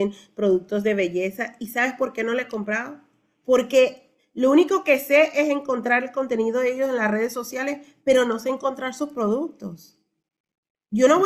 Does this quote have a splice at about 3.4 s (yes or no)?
no